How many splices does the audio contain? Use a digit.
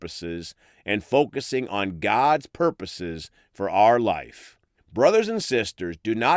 1